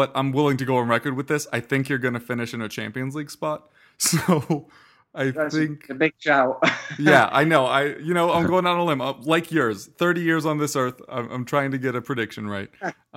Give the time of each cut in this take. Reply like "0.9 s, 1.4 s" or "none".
none